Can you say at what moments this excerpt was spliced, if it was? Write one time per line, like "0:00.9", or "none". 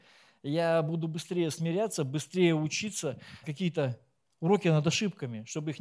0:03.4